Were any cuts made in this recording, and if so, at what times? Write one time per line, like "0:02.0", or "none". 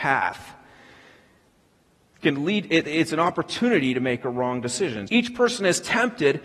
0:05.1